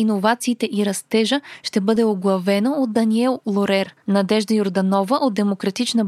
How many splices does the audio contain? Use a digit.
0